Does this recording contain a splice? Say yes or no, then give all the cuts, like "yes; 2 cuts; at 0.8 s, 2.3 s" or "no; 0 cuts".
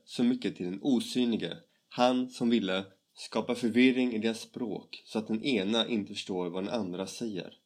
yes; 1 cut; at 3.0 s